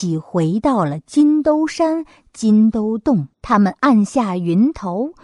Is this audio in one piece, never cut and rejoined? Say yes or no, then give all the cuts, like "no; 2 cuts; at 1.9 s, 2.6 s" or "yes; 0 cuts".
no; 1 cut; at 3.3 s